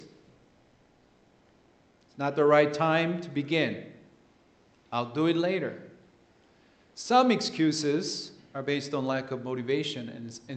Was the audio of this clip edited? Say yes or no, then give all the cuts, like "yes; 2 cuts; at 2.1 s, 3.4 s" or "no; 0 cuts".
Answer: yes; 1 cut; at 1.9 s